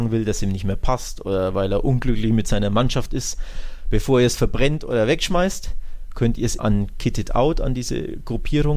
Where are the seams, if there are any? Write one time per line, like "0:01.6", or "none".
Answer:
0:06.6